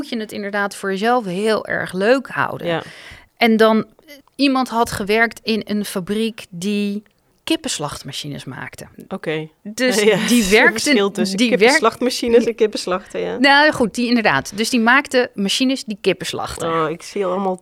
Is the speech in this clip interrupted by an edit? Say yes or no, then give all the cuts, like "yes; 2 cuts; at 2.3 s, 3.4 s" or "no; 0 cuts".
yes; 1 cut; at 8.9 s